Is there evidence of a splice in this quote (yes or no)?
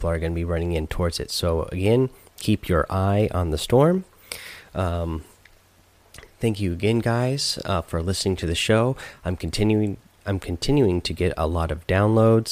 no